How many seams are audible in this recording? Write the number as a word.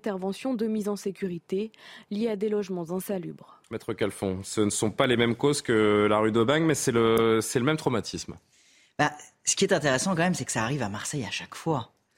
one